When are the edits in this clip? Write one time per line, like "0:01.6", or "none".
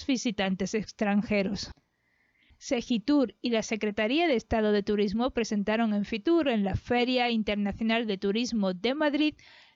none